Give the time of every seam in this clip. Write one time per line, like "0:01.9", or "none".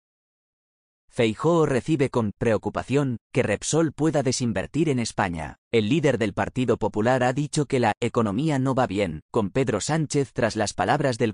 0:05.6